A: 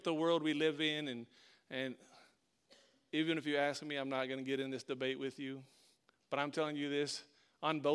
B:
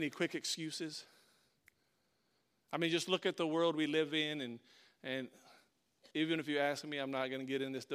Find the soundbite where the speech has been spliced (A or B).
B